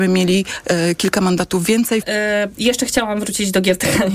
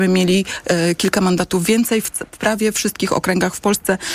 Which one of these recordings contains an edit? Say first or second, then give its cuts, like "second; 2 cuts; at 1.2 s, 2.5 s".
first; 1 cut; at 2.0 s